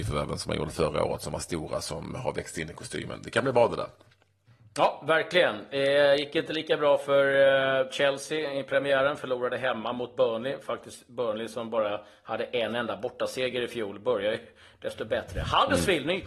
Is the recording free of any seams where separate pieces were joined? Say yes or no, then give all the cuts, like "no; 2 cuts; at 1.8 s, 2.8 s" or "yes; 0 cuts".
yes; 0 cuts